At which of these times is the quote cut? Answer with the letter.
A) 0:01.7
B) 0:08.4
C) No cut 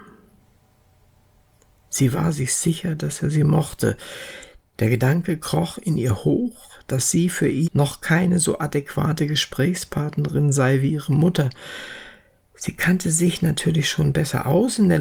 C